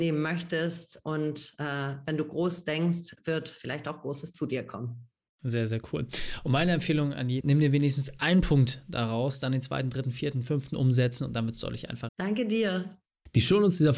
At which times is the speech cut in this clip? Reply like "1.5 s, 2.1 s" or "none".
7.4 s, 12.1 s